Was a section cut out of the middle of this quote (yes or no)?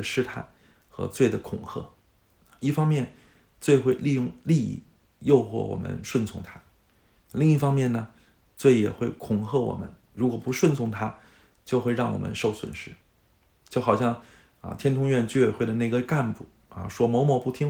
no